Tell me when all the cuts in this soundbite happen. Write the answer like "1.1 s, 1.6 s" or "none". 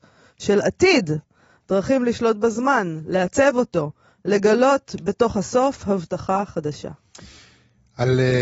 none

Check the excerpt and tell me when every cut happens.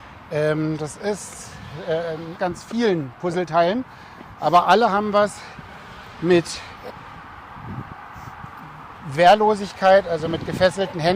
2.4 s

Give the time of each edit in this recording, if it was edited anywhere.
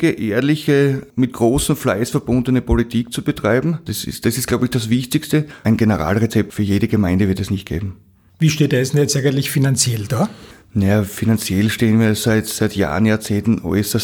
3.9 s

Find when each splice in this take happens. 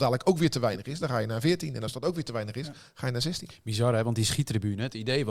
none

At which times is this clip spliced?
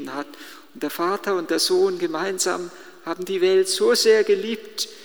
none

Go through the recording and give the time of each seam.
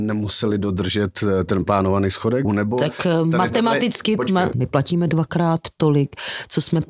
2.4 s, 4.5 s

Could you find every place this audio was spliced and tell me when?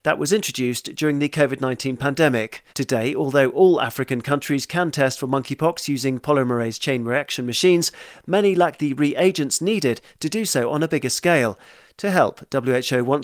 2.7 s

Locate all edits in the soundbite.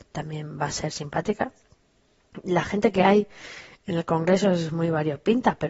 none

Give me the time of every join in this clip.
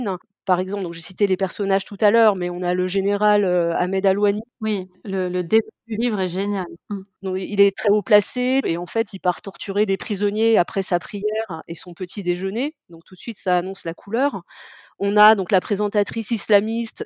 8.6 s

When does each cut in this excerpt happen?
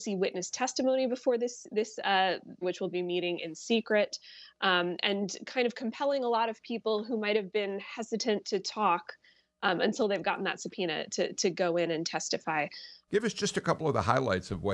2.6 s, 8.4 s, 13.1 s

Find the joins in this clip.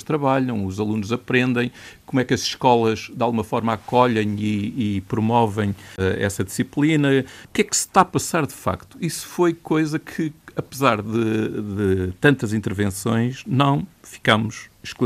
none

